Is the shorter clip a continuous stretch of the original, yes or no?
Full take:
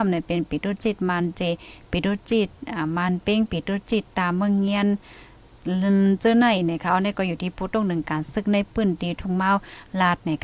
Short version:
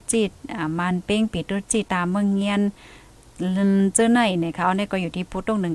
no